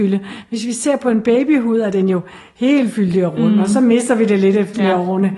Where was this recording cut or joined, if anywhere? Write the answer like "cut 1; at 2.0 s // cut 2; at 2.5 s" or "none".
none